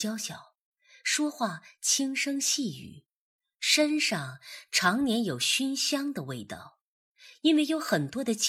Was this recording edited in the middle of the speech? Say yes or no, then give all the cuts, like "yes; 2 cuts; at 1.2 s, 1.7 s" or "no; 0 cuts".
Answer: no; 0 cuts